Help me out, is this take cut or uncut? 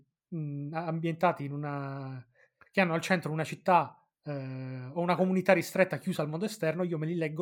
uncut